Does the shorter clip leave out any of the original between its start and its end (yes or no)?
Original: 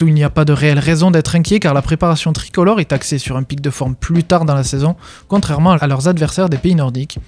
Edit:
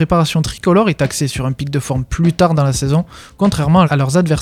no